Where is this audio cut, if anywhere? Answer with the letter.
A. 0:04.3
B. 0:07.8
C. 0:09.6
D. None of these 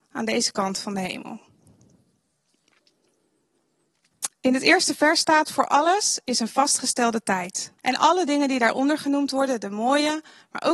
B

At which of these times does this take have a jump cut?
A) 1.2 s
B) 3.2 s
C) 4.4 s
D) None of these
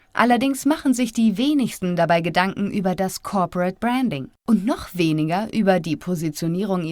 C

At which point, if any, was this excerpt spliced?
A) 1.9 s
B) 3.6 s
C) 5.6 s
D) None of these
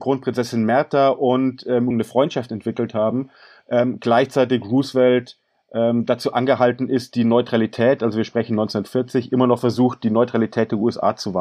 A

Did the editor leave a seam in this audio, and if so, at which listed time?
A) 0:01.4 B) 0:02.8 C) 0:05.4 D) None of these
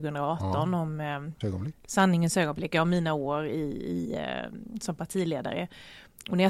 A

